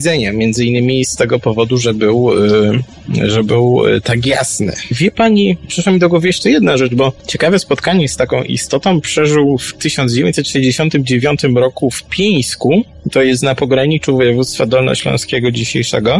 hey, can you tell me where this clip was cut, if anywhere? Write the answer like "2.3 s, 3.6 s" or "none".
none